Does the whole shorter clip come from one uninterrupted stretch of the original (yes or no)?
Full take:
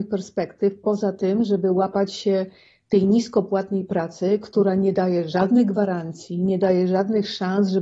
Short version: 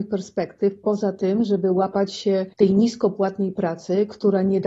no